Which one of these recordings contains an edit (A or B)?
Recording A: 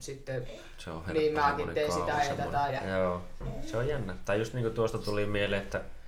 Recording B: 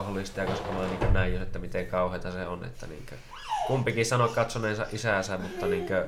A